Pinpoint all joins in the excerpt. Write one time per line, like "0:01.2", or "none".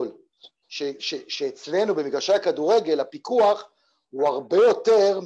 none